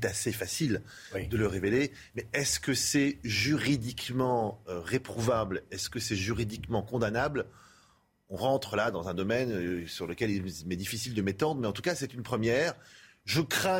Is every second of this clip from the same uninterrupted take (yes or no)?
no